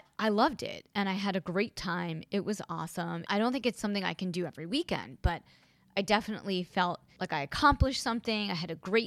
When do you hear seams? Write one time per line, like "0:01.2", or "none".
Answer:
0:03.2